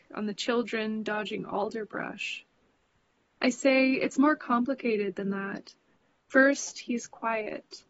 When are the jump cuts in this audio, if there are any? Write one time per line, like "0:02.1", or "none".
0:06.2